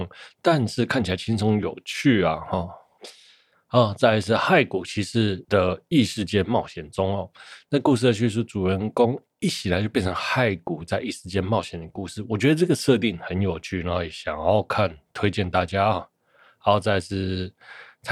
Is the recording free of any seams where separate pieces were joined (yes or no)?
yes